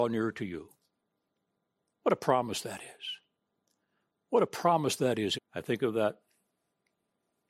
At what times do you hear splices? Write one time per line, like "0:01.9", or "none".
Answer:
0:05.3